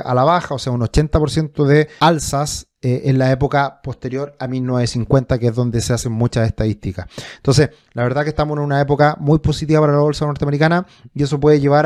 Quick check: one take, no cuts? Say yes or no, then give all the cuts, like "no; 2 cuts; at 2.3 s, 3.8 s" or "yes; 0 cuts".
yes; 0 cuts